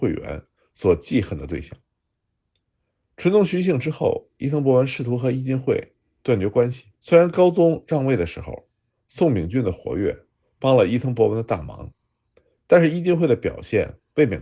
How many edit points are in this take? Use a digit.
1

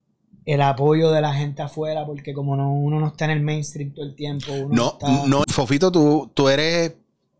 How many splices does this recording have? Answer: 1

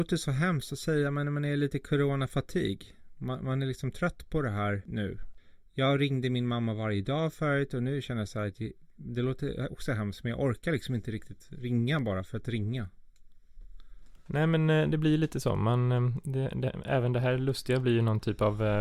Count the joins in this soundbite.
0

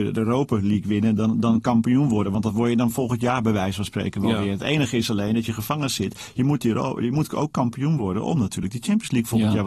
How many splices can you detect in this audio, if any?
0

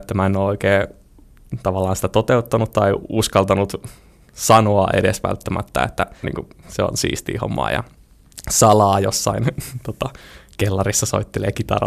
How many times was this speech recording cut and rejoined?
1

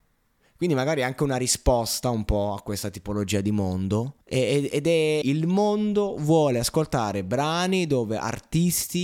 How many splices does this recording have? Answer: 2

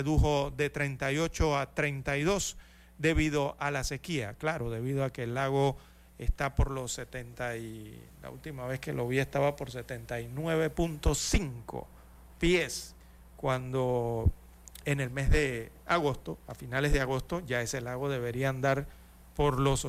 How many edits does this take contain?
2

